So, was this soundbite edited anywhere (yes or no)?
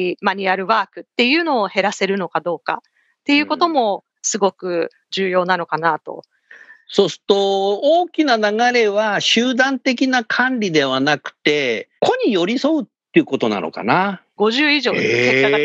yes